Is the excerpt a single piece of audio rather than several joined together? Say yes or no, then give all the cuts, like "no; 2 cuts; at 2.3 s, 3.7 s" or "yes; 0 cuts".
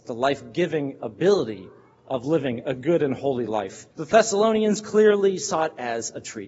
no; 1 cut; at 3.9 s